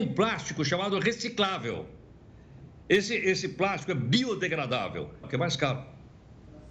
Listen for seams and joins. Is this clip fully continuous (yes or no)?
no